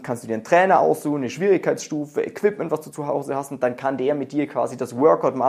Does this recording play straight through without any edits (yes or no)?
yes